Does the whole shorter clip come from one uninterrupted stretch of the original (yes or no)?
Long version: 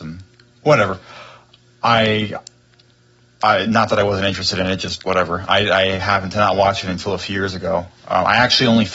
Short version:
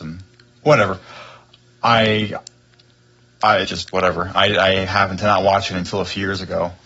no